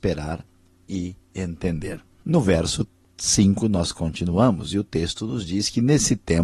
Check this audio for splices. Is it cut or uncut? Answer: uncut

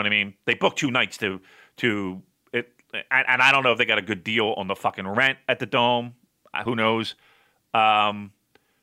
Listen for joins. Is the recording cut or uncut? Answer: uncut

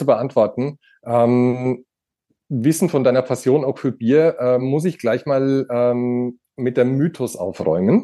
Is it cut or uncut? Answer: uncut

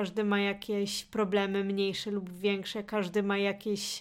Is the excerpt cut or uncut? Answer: uncut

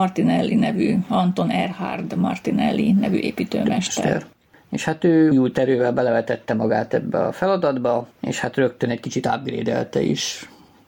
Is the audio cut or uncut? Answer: cut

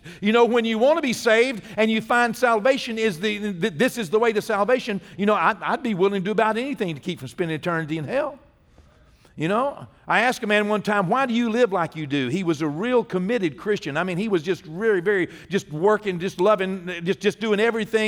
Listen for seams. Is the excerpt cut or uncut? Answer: uncut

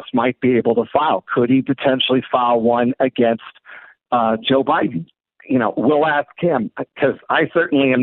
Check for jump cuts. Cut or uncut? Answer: uncut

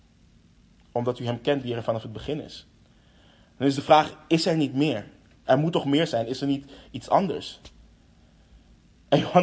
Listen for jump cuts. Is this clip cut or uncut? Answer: uncut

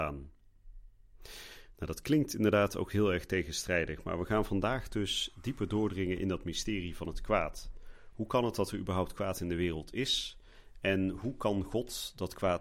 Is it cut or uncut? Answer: uncut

